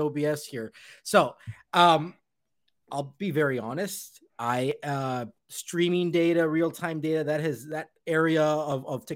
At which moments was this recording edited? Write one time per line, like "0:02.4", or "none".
none